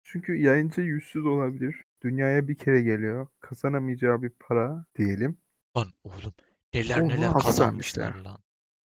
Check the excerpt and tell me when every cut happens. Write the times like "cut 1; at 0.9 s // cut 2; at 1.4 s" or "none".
cut 1; at 1.8 s // cut 2; at 4.9 s